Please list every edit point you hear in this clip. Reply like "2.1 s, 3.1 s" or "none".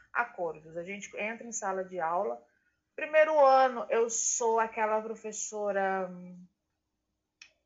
none